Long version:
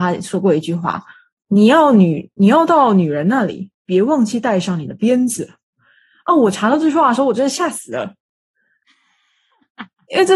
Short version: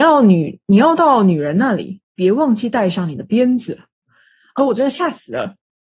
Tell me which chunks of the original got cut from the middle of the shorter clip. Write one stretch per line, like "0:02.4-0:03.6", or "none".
0:06.3-0:07.2